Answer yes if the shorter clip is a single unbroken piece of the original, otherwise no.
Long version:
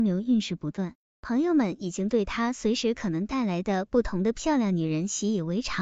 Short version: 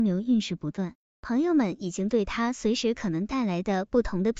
yes